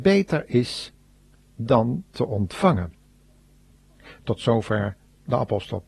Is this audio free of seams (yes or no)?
yes